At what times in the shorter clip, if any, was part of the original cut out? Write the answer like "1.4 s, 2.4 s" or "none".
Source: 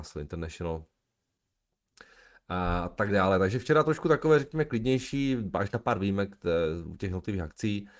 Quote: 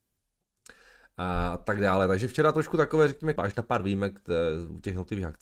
3.4 s